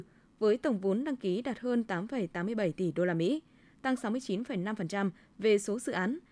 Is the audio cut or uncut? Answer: uncut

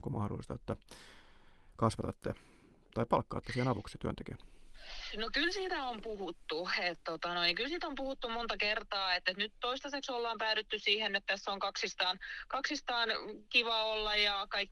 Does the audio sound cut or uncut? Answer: uncut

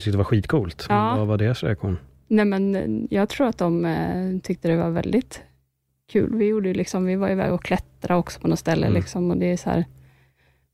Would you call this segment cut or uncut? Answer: uncut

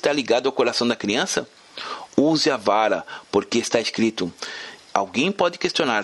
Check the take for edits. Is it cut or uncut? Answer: cut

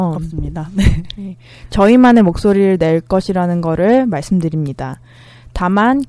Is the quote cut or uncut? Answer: uncut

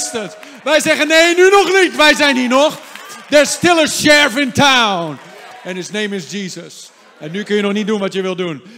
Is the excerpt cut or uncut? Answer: uncut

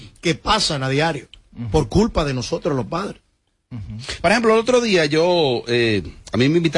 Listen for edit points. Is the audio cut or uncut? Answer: uncut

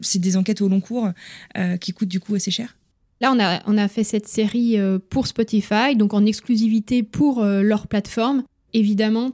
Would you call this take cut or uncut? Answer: uncut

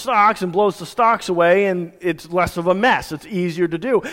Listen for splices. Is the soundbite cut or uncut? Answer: uncut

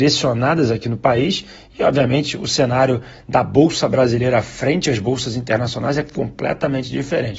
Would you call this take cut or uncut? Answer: uncut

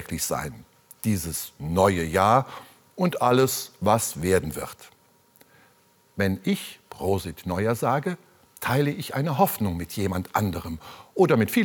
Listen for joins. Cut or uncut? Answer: uncut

